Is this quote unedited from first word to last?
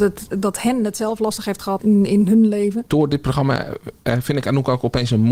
no; 2 cuts; at 1.8 s, 2.9 s

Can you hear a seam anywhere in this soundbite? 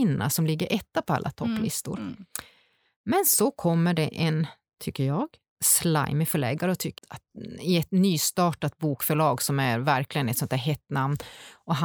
yes; 1 cut; at 7.0 s

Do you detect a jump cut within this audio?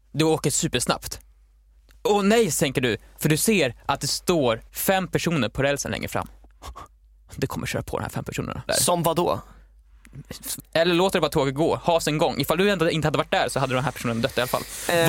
yes; 3 cuts; at 4.7 s, 8.7 s, 10.6 s

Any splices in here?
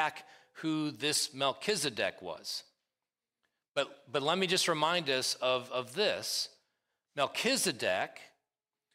no; 0 cuts

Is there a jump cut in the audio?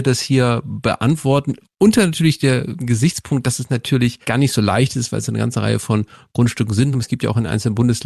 yes; 2 cuts; at 4.2 s, 6.9 s

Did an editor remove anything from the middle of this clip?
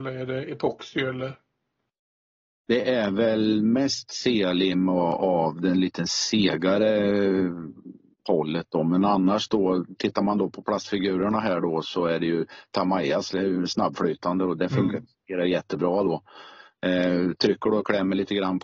no; 0 cuts

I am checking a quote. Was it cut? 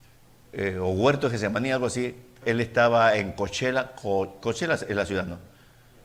yes; 1 cut; at 2.4 s

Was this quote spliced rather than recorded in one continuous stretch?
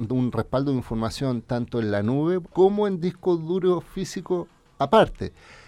yes; 1 cut; at 2.4 s

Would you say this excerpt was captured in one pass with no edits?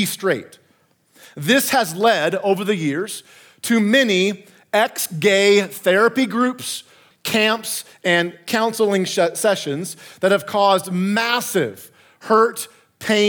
no; 1 cut; at 7.1 s

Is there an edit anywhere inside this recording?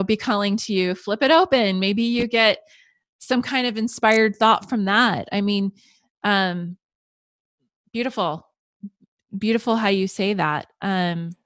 no; 0 cuts

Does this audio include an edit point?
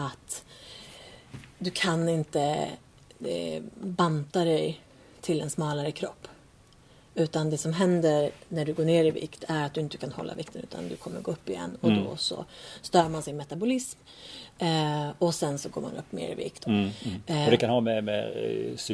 yes; 1 cut; at 16.6 s

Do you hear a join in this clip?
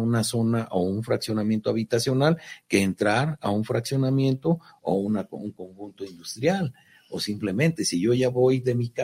no; 0 cuts

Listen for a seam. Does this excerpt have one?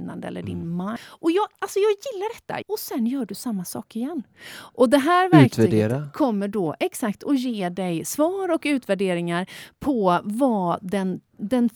yes; 2 cuts; at 1.0 s, 2.6 s

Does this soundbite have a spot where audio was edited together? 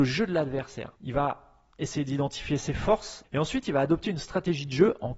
yes; 2 cuts; at 1.0 s, 3.2 s

